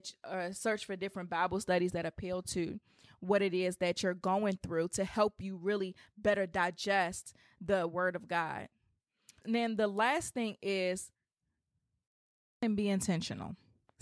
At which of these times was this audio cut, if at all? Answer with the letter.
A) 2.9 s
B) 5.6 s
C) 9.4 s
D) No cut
C